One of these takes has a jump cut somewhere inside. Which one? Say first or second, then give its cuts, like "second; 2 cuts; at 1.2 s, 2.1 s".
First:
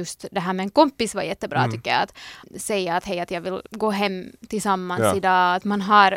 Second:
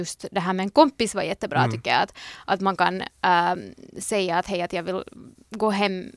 first; 2 cuts; at 2.4 s, 3.7 s